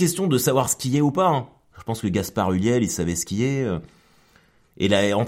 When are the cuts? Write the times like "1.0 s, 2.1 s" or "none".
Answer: none